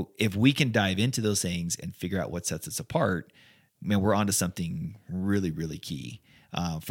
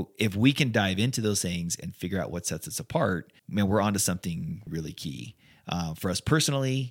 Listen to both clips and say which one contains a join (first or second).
second